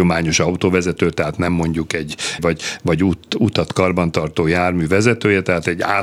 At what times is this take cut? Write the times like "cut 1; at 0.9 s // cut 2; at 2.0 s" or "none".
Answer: cut 1; at 2.4 s